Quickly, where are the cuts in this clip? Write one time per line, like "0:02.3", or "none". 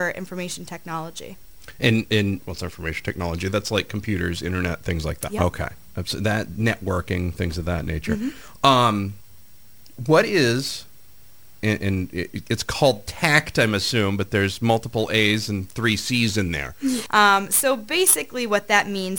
0:02.4
0:05.3
0:17.1